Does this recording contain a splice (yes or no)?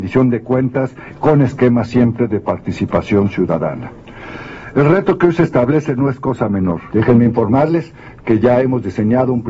yes